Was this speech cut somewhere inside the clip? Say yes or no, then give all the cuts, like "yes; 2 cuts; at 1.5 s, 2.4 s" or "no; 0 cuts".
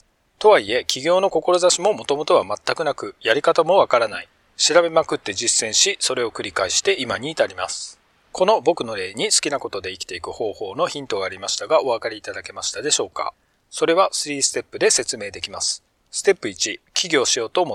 no; 0 cuts